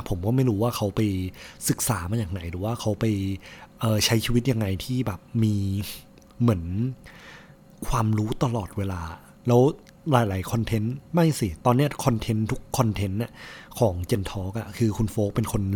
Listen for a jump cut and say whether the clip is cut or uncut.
uncut